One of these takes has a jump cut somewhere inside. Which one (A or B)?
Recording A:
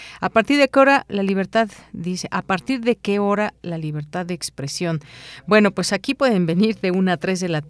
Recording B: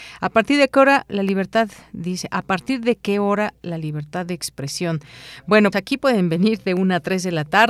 B